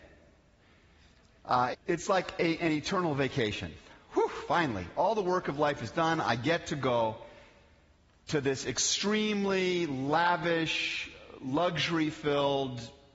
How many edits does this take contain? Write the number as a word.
one